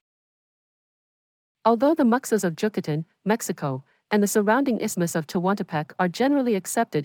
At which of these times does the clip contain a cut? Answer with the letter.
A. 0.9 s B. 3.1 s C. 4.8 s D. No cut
D